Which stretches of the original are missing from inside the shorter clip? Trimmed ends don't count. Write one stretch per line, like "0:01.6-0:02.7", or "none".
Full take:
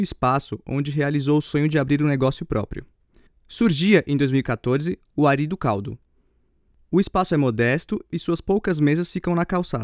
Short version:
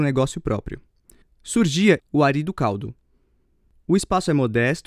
0:04.0-0:05.0